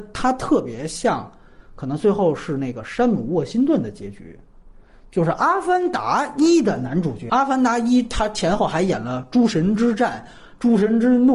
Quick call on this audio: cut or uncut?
uncut